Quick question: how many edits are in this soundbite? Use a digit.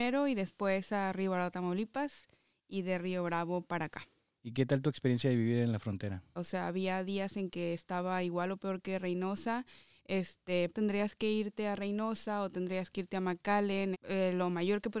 3